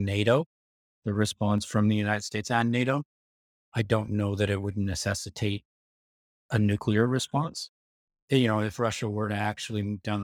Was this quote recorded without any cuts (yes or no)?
no